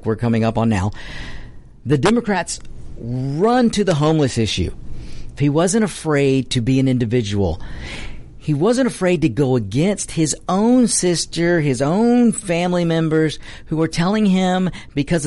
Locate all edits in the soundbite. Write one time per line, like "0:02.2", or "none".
0:05.4